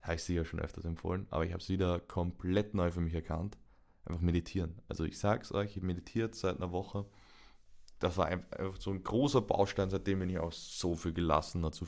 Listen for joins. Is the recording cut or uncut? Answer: uncut